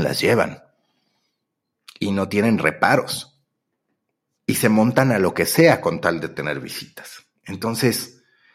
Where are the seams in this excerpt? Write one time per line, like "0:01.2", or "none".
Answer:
none